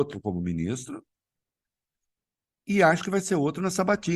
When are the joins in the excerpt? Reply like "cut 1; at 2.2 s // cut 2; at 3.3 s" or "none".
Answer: none